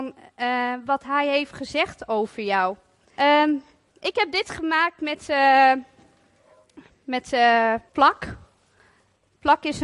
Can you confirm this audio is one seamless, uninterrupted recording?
no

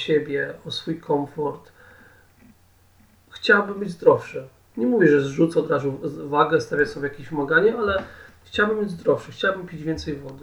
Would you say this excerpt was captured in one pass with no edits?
yes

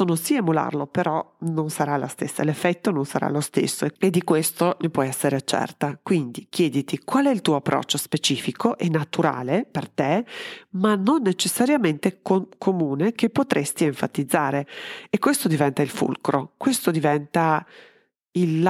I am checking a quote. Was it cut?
no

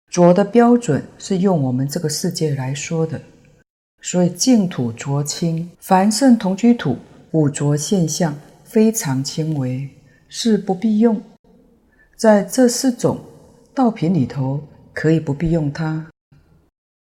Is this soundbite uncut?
no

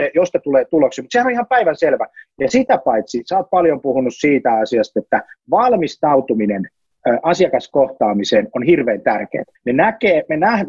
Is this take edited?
yes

